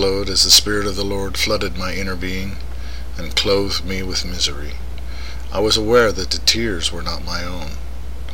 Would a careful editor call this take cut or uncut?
uncut